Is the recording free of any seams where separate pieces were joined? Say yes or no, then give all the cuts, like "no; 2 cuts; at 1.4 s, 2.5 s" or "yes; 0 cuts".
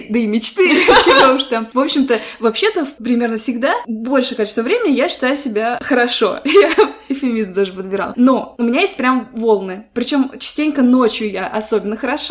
yes; 0 cuts